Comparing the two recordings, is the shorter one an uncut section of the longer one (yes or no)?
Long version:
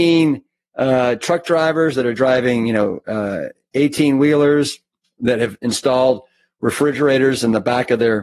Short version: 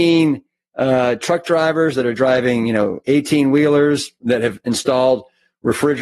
no